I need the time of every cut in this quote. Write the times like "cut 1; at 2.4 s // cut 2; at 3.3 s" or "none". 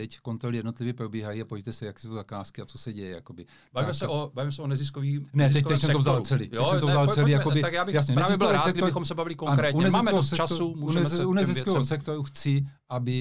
none